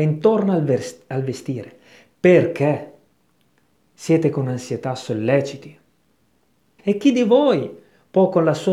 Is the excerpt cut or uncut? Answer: cut